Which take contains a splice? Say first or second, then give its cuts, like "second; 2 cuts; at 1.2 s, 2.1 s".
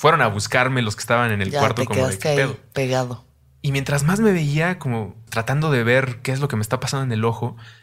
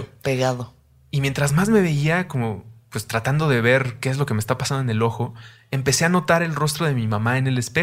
first; 1 cut; at 5.3 s